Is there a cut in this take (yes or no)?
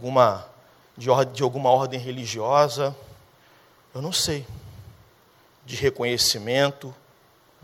no